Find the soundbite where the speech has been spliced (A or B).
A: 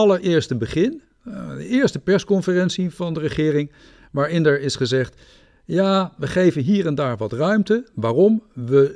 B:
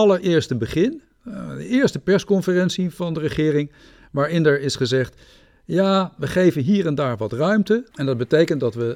B